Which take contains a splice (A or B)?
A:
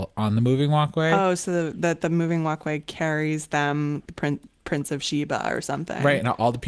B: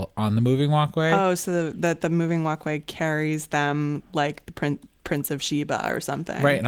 A